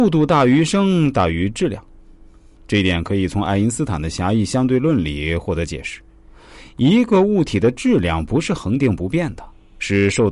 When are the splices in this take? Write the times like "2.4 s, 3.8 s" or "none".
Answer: none